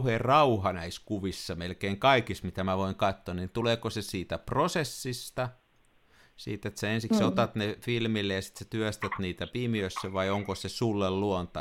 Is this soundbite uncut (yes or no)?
yes